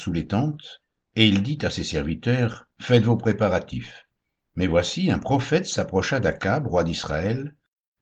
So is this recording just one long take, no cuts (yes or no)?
no